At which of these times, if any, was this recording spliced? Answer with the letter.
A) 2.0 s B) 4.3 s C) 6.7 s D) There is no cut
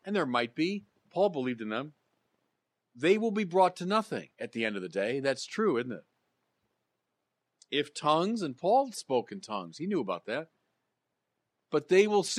B